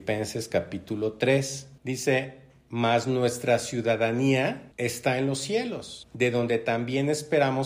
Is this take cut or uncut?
uncut